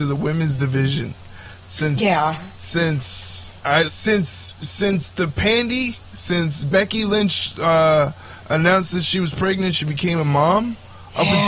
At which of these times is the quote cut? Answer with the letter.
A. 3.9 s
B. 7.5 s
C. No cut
A